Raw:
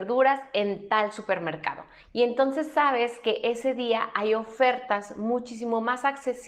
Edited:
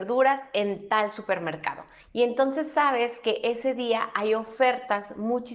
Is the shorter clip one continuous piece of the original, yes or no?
yes